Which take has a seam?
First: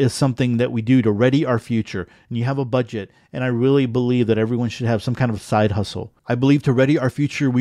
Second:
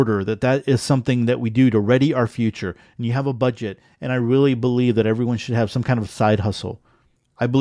first; 1 cut; at 6.2 s

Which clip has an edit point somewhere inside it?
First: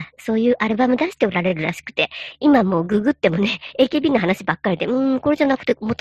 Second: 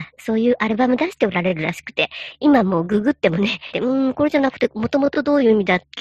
second; 1 cut; at 3.7 s

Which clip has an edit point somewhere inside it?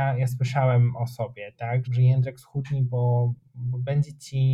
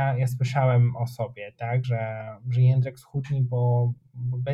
first; 1 cut; at 1.8 s

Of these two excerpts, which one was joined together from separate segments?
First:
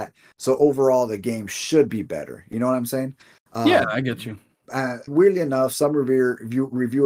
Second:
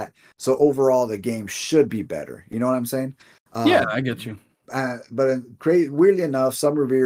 first; 1 cut; at 5.1 s

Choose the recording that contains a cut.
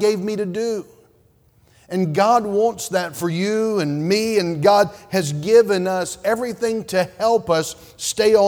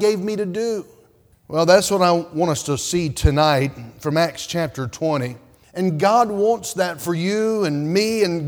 second; 2 cuts; at 1.3 s, 5.6 s

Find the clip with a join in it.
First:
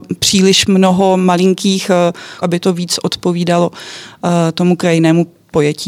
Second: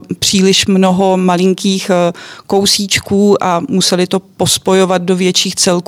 first; 1 cut; at 2.4 s

